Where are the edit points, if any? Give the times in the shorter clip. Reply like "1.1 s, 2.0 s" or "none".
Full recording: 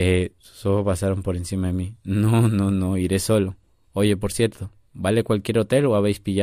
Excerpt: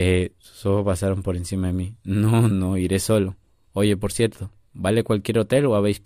2.5 s